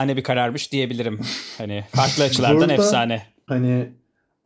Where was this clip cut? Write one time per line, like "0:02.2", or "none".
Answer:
0:03.5